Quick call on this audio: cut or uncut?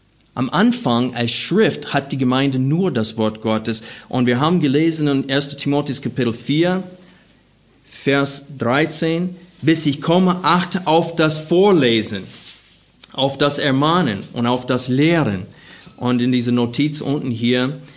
uncut